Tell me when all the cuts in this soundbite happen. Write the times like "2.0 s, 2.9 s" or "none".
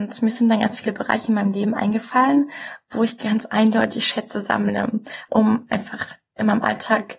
5.3 s